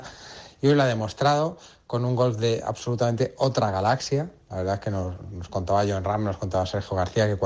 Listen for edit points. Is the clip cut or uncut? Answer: uncut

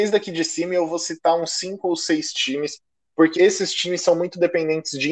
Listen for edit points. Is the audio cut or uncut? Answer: cut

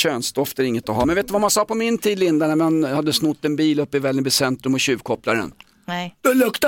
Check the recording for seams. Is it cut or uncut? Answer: uncut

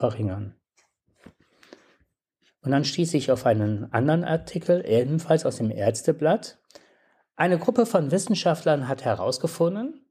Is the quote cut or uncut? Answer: uncut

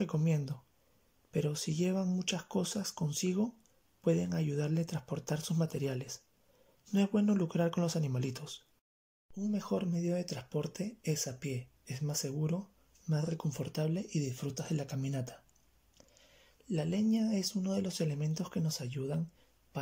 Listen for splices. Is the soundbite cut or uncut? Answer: uncut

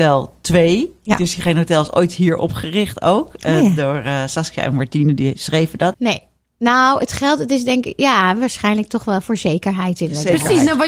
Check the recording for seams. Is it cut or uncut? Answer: cut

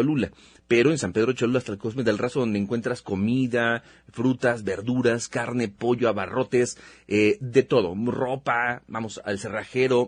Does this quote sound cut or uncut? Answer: uncut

